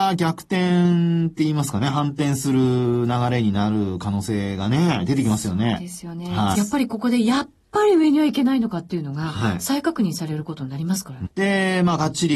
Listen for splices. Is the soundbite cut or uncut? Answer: cut